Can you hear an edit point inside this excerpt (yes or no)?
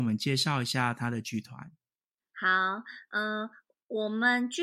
no